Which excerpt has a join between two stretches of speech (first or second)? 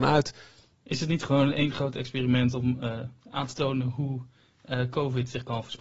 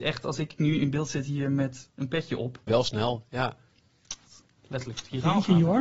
second